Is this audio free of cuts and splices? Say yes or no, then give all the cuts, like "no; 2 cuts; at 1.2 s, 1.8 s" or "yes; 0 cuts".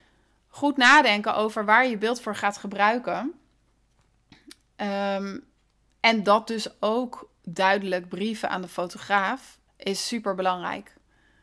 no; 1 cut; at 9.7 s